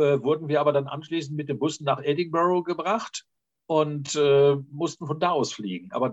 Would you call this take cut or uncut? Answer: uncut